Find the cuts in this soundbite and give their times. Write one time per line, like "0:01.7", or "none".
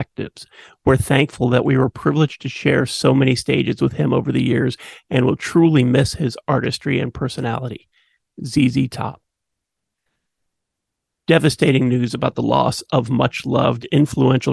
none